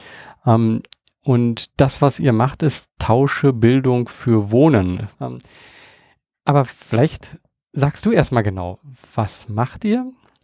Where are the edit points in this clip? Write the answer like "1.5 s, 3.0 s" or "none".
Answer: 5.1 s

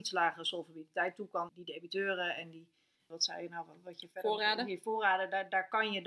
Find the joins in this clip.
1.5 s

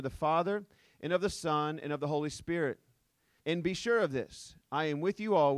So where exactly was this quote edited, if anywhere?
3.4 s

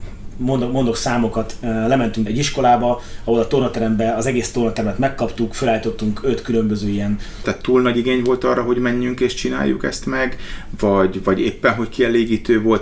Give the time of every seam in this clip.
2.3 s, 7.4 s

